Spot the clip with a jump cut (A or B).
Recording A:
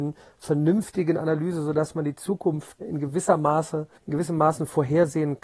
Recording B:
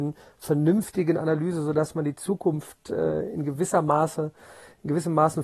A